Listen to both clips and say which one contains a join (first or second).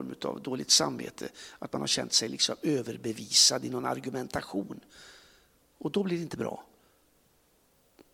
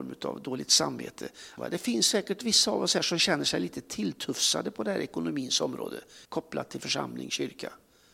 second